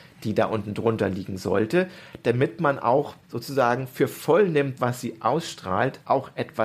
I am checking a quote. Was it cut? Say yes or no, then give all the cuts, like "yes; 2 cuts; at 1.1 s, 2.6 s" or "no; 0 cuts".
yes; 2 cuts; at 3.2 s, 4.8 s